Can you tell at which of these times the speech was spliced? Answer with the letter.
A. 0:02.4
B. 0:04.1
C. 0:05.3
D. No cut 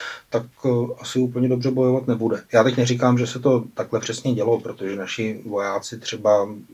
A